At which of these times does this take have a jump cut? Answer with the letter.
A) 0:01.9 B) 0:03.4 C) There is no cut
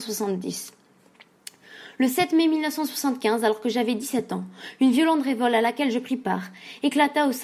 C